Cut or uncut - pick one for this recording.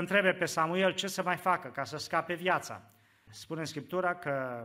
cut